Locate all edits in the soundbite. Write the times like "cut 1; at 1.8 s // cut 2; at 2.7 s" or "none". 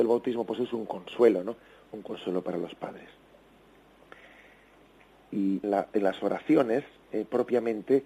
cut 1; at 5.6 s